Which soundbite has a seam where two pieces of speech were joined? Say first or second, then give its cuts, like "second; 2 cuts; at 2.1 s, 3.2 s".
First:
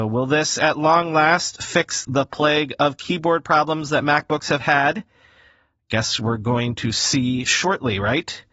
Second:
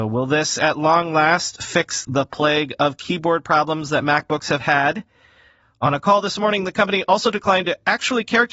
second; 1 cut; at 5.6 s